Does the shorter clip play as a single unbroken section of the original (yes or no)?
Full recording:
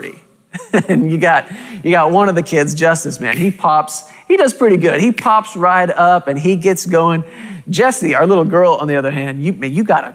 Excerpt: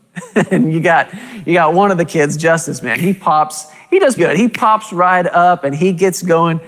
no